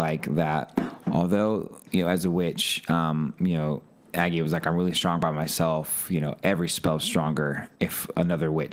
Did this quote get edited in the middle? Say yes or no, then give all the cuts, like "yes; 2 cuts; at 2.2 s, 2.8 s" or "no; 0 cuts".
yes; 1 cut; at 7.8 s